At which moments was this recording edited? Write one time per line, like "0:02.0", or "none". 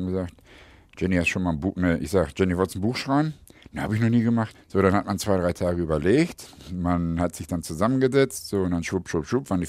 0:04.5